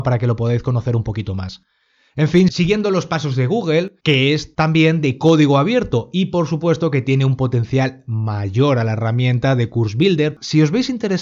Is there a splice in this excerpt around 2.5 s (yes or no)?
no